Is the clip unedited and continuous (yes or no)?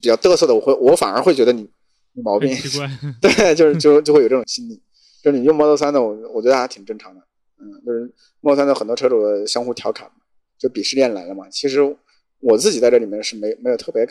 no